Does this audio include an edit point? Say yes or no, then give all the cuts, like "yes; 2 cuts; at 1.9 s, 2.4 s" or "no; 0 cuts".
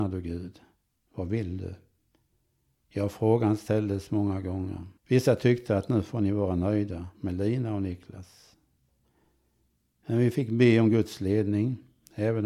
yes; 1 cut; at 5.0 s